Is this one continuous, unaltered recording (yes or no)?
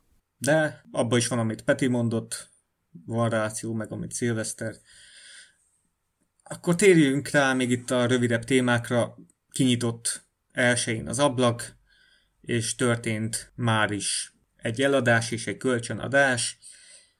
yes